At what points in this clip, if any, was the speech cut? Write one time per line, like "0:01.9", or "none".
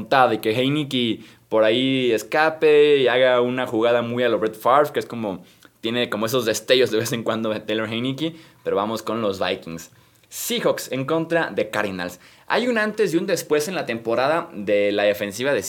none